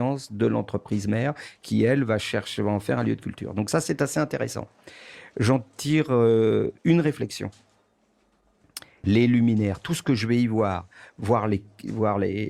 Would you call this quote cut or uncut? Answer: cut